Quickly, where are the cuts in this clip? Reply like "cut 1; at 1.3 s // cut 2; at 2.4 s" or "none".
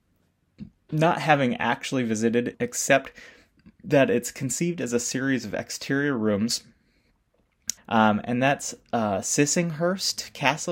cut 1; at 2.5 s // cut 2; at 7.8 s